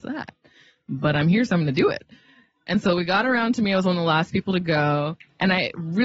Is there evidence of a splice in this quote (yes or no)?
no